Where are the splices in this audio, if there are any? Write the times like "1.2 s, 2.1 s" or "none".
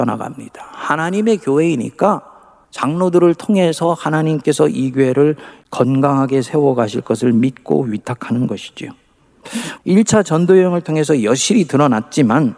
9.8 s